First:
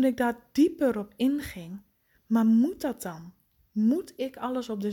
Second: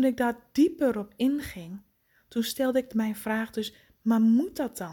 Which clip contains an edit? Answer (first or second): first